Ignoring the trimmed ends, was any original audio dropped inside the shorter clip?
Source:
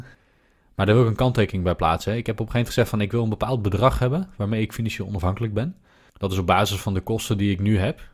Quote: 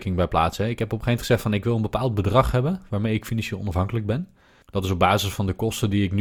no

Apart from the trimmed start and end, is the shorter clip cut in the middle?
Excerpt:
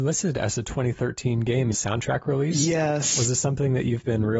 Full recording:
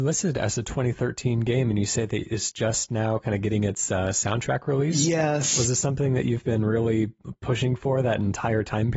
yes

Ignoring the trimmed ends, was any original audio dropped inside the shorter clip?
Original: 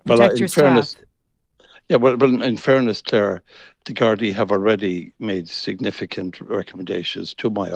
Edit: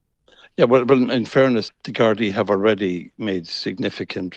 yes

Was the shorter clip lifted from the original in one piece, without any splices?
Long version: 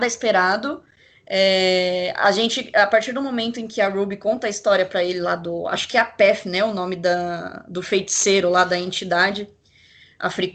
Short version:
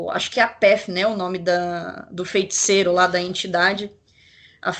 yes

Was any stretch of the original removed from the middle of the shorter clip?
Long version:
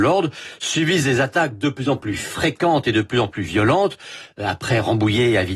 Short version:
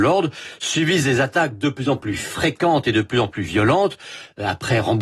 no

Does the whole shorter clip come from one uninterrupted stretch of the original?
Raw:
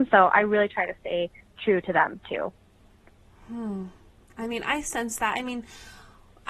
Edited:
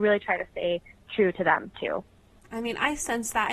no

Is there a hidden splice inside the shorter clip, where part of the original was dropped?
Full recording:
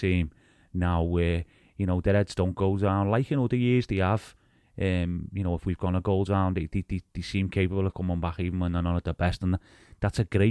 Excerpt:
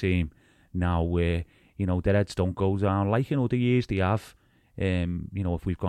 no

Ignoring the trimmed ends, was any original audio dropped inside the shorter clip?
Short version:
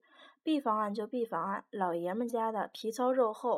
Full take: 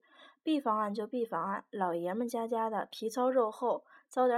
yes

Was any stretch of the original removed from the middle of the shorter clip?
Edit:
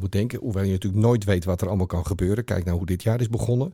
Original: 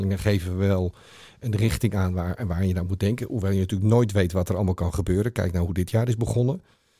no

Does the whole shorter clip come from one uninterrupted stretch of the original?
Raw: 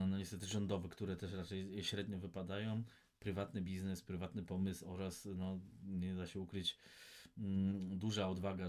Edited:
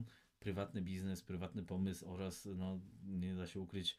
yes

